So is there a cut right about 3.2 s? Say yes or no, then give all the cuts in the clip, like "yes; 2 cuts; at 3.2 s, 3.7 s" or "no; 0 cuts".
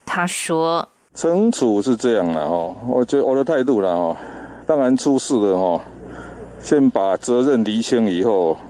yes; 1 cut; at 3.2 s